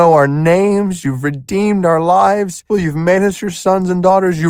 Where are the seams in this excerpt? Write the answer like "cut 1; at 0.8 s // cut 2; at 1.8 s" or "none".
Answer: cut 1; at 1.0 s // cut 2; at 2.7 s